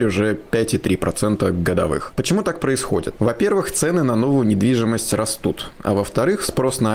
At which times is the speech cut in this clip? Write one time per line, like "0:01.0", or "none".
none